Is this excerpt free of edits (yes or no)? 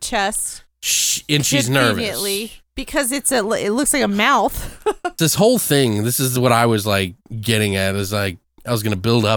no